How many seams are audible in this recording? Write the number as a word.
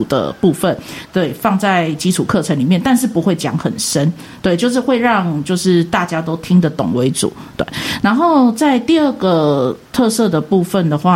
one